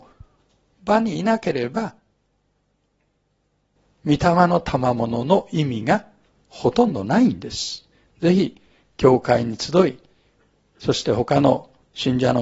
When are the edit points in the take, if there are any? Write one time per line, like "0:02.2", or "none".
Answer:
none